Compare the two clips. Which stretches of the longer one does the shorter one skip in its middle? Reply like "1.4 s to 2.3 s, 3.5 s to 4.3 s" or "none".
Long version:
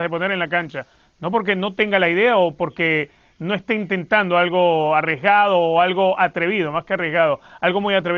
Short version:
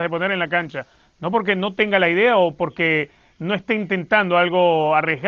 none